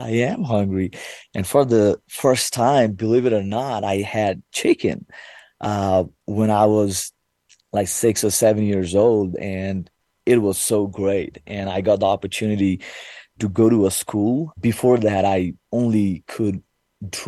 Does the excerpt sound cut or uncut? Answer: cut